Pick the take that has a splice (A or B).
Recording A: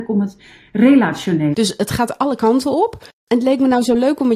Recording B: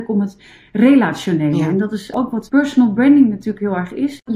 A